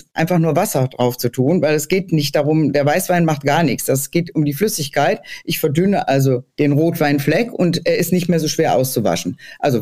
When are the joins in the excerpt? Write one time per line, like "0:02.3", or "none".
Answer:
0:06.5